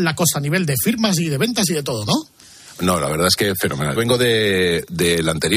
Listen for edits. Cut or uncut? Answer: cut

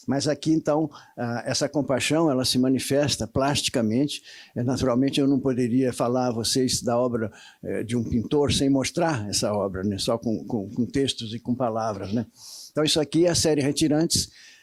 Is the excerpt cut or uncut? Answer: uncut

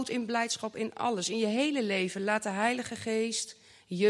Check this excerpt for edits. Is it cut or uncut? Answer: uncut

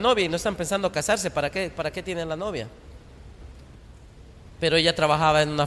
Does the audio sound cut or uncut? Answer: cut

